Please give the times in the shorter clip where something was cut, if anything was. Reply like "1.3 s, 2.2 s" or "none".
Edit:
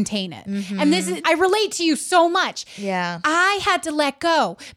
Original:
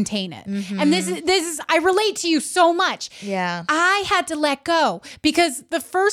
1.2 s